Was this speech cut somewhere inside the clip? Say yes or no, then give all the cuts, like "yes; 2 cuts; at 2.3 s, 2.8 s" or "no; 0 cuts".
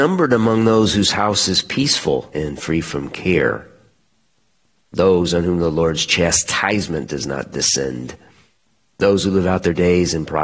yes; 1 cut; at 2.3 s